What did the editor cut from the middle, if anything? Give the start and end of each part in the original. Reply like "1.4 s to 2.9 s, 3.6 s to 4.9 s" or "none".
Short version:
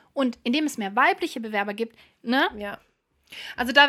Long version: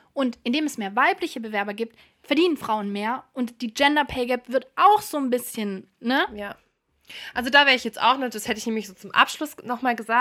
2.2 s to 5.9 s